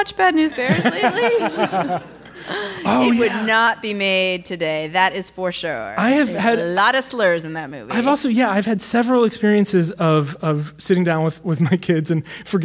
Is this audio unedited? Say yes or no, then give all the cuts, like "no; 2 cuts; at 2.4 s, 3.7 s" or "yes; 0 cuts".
yes; 0 cuts